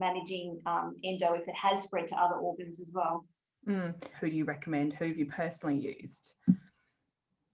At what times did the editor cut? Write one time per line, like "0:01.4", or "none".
0:04.1

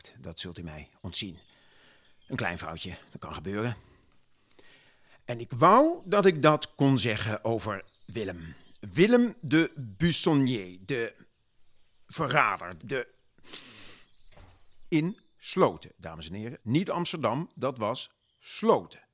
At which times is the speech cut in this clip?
0:12.8
0:14.9
0:16.6

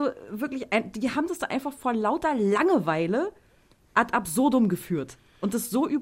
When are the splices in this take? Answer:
none

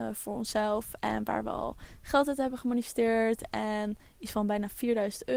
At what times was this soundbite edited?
none

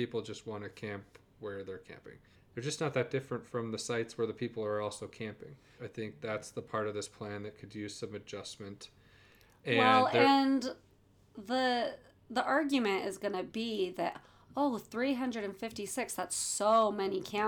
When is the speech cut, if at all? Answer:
0:02.4
0:05.8

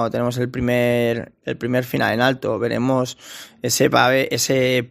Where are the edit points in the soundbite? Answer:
none

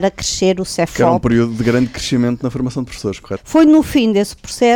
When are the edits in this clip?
0:03.4

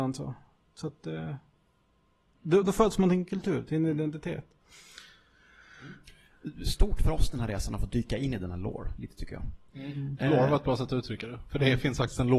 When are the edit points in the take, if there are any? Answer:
0:02.6

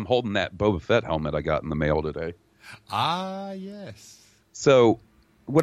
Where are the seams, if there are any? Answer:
none

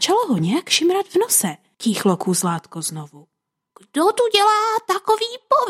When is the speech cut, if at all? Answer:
0:01.7
0:03.7

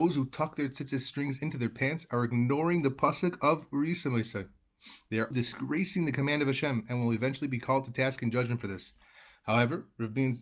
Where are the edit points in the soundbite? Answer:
0:05.3

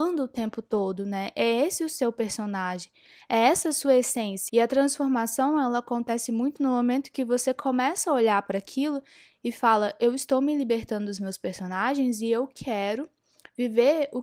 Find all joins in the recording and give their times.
0:04.5

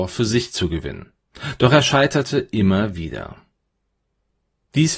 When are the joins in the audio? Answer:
none

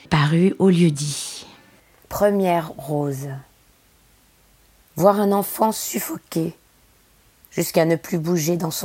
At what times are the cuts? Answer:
0:02.0

